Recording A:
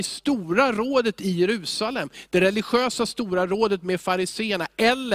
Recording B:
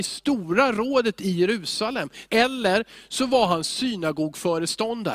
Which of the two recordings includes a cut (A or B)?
B